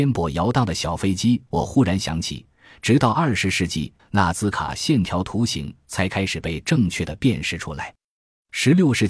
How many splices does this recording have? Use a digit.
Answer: 2